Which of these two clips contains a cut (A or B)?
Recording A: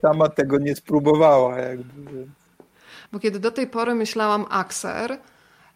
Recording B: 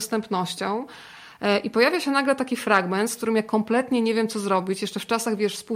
A